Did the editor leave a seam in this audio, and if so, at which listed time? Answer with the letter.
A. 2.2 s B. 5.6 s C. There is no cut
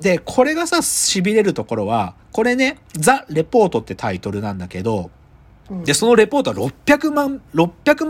A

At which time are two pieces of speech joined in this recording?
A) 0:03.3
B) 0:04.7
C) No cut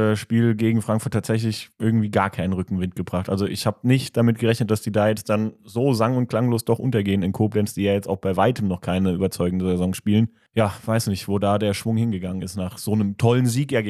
C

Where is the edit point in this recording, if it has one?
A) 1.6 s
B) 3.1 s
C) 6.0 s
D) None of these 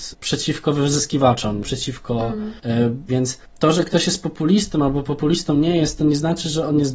B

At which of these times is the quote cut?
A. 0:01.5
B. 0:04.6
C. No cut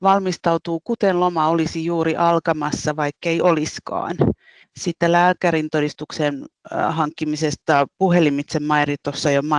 B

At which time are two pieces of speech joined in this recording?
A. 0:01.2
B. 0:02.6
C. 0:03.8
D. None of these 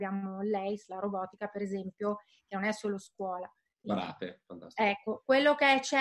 C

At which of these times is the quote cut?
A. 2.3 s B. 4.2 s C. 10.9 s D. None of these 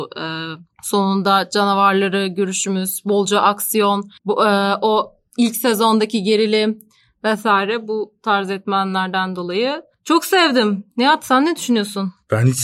B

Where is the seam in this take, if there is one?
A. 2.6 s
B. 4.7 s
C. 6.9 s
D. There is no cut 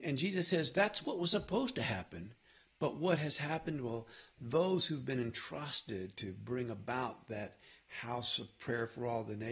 D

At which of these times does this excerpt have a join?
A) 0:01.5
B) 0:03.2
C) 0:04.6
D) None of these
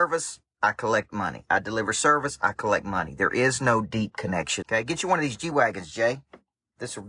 C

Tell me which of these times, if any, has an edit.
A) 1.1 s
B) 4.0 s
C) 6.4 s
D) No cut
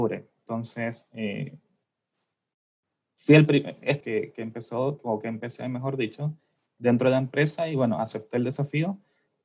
B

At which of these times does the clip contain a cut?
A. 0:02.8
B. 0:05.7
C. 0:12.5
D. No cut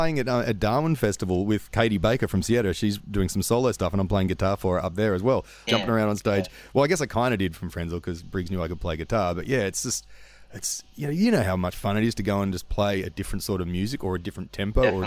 B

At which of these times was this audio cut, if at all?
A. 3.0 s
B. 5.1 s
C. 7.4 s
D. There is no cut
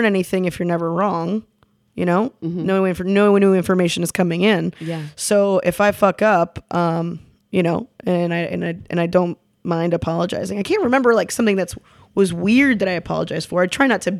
C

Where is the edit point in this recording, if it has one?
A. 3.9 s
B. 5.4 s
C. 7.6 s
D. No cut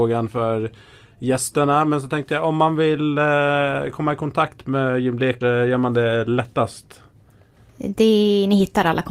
B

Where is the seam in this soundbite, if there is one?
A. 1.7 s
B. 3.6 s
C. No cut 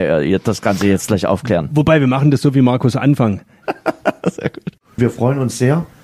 B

